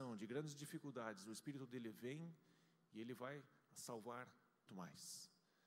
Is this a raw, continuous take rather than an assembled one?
no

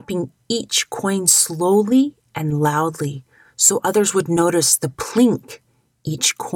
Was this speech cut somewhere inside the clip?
no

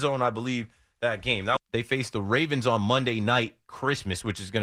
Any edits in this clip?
yes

